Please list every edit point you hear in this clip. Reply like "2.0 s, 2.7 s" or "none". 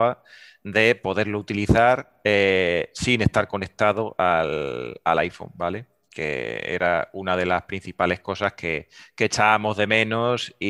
none